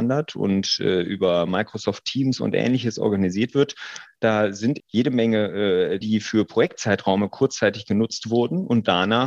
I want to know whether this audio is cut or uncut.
cut